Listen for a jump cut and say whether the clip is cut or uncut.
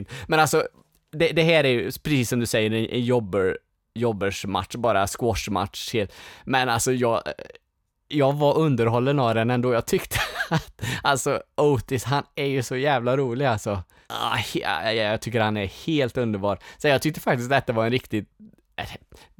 uncut